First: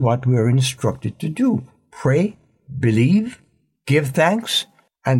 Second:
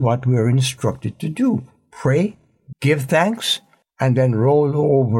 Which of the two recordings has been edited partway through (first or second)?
second